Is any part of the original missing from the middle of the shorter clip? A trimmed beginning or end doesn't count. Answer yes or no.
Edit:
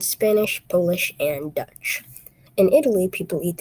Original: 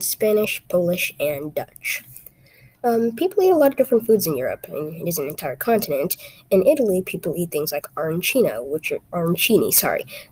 yes